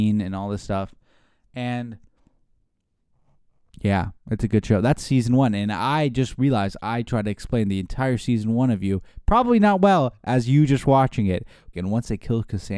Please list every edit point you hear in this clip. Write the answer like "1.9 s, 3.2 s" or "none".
11.7 s